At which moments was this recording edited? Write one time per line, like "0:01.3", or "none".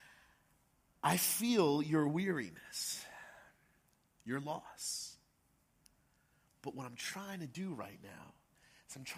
0:04.0